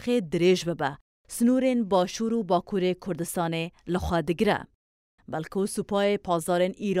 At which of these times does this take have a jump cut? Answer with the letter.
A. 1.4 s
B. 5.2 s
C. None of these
B